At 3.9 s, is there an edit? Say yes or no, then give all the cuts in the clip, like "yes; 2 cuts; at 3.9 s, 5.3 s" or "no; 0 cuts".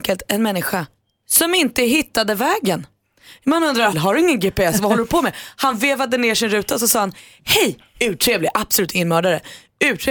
yes; 1 cut; at 3.9 s